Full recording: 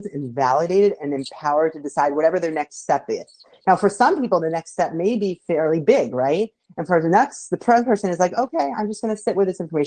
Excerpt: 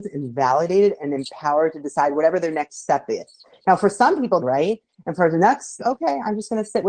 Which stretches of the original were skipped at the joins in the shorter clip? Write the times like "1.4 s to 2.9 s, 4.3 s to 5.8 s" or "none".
4.4 s to 6.1 s, 7.5 s to 8.3 s